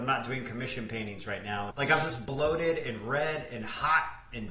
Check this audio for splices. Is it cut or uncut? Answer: cut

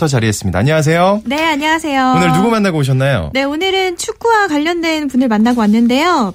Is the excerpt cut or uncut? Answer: uncut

